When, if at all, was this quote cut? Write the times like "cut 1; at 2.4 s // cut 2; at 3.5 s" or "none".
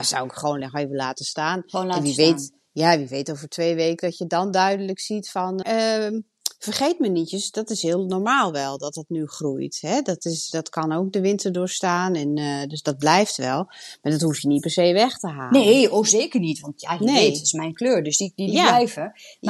cut 1; at 5.6 s